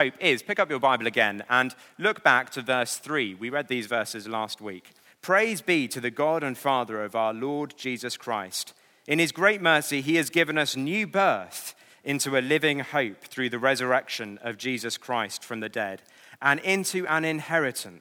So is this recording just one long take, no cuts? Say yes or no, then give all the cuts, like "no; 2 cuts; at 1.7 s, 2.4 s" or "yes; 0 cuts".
no; 1 cut; at 5.0 s